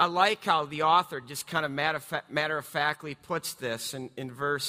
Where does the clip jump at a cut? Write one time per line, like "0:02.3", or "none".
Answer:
none

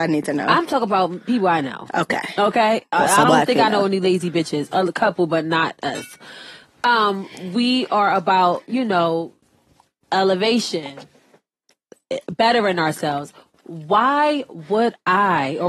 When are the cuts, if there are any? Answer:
none

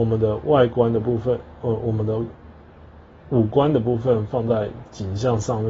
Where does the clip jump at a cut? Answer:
none

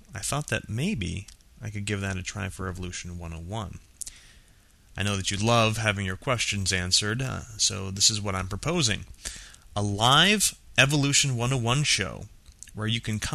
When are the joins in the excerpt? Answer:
none

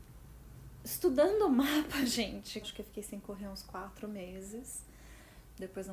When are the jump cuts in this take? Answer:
0:02.6

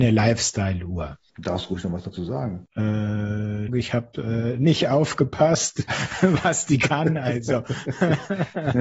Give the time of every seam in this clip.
0:03.7

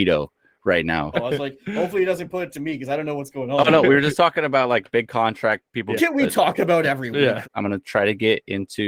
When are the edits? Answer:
0:01.1
0:06.0
0:07.4

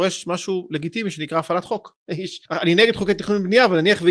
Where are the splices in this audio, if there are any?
0:02.5

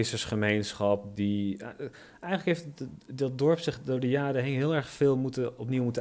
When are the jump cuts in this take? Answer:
none

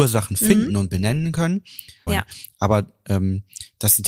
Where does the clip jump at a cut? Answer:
0:02.1

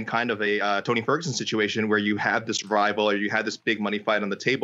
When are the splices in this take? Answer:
none

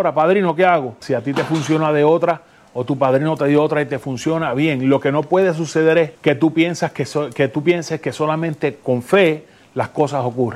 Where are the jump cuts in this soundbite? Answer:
0:01.0

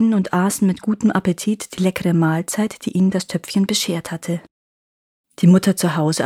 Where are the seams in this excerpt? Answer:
0:05.2

